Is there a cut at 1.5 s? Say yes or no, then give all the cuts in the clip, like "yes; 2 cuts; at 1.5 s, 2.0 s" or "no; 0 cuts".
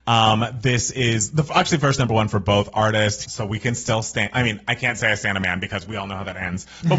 no; 1 cut; at 3.2 s